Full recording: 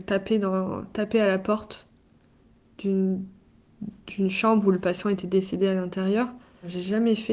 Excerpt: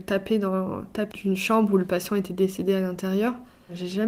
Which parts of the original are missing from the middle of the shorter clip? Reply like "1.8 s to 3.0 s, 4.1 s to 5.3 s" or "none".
1.1 s to 4.1 s